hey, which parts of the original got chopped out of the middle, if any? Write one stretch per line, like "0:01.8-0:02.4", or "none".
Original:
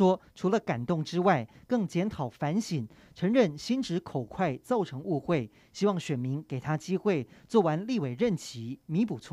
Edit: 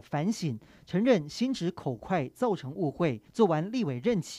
0:05.6-0:07.4